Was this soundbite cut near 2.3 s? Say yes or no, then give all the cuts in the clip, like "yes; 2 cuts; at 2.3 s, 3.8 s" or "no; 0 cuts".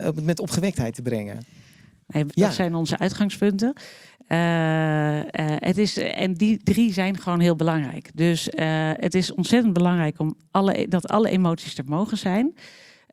yes; 1 cut; at 2.3 s